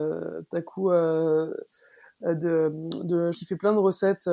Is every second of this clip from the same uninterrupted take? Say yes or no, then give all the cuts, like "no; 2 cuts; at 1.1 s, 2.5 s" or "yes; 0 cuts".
no; 1 cut; at 3.3 s